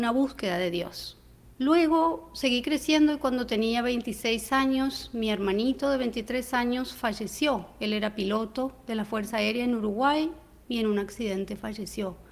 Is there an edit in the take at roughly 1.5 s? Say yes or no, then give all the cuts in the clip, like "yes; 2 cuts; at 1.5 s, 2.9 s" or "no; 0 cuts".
yes; 1 cut; at 1.5 s